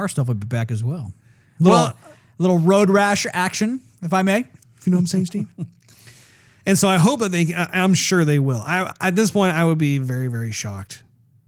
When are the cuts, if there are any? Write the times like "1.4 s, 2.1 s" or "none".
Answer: 4.6 s